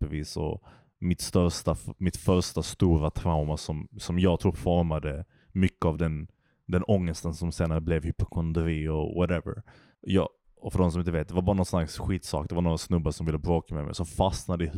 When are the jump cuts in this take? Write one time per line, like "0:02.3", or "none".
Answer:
0:09.9